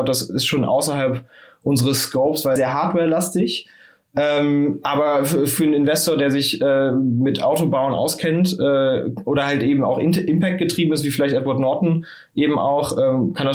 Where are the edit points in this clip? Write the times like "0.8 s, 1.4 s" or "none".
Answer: 2.6 s